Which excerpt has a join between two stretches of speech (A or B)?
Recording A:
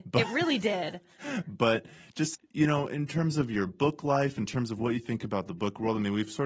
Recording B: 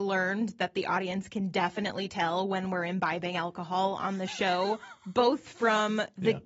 A